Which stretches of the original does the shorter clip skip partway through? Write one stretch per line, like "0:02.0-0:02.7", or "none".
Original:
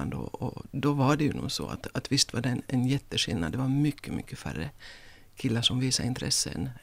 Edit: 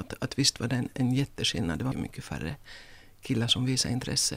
0:03.7-0:04.1